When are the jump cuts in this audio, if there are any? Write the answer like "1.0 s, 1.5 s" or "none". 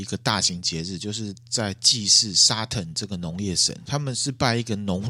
3.8 s